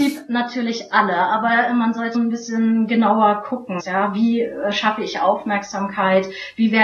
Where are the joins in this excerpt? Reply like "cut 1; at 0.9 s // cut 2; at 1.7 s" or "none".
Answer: cut 1; at 2.1 s // cut 2; at 3.8 s